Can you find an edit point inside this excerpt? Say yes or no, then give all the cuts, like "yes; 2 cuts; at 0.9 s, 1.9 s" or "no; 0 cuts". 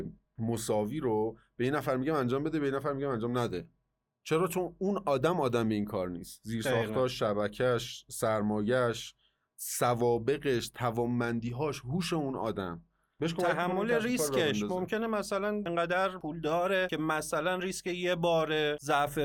no; 0 cuts